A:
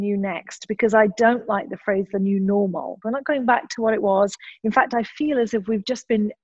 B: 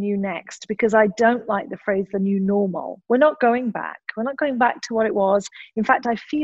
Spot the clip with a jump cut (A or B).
A